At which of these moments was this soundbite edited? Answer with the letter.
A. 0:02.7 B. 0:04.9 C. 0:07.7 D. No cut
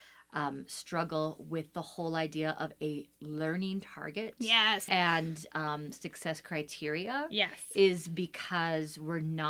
B